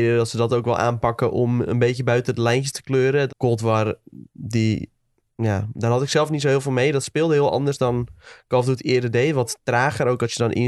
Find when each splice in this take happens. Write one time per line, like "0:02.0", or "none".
0:03.3

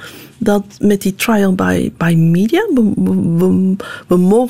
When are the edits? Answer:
none

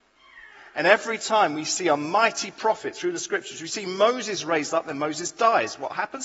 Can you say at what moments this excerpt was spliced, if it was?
none

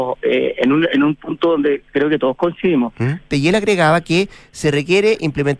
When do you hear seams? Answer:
0:03.3

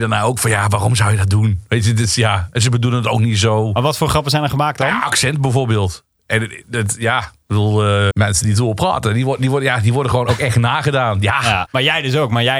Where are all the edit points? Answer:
0:08.1
0:11.7

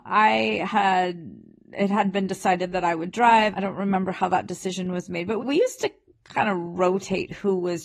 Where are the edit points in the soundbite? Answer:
0:03.5
0:05.4

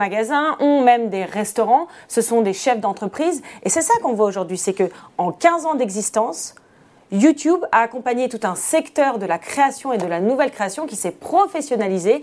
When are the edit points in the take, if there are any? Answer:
none

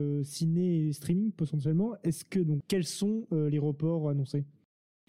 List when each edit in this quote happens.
0:02.6

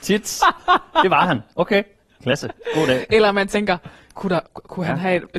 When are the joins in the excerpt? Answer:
none

